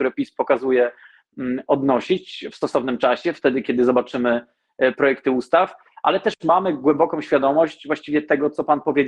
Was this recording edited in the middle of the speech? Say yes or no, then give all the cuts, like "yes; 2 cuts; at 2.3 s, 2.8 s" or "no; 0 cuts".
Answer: no; 0 cuts